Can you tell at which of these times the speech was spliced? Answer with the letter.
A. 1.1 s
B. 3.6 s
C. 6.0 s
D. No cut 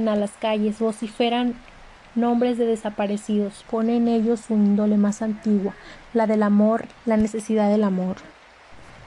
B